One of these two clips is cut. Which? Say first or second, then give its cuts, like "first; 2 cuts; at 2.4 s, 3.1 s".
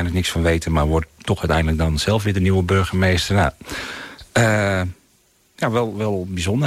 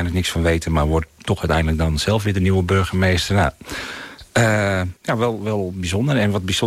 second; 1 cut; at 5.0 s